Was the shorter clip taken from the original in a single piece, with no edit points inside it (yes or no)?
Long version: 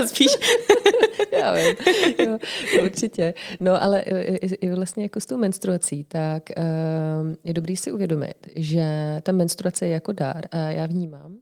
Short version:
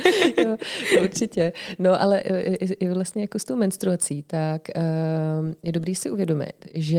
yes